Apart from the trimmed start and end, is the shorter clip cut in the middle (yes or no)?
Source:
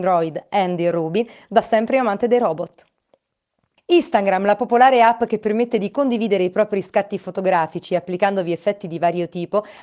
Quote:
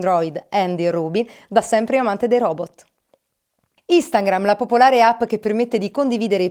no